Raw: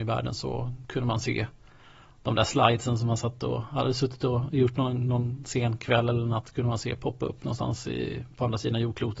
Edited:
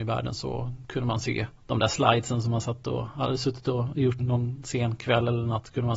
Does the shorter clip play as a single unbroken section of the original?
no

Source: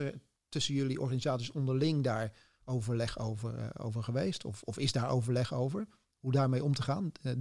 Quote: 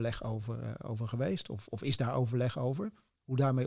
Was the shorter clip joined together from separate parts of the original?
no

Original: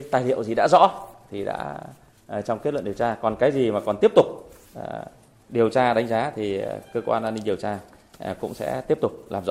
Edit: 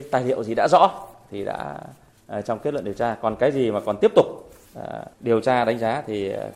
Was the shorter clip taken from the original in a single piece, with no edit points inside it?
no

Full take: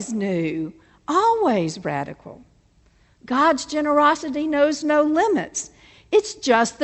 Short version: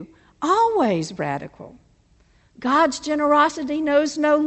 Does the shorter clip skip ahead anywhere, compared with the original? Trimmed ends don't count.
no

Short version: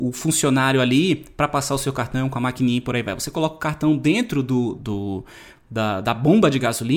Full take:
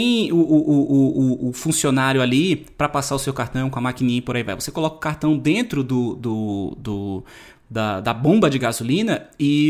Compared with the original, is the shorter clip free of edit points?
no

